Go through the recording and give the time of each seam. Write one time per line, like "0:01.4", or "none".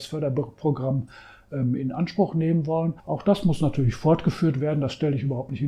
0:03.0

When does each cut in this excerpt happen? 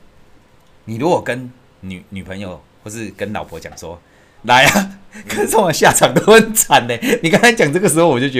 0:04.4

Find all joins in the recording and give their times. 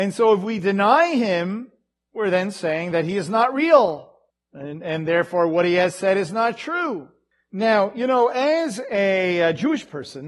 none

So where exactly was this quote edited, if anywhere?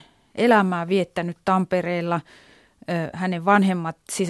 none

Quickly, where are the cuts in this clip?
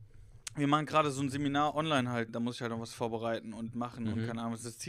0:02.3

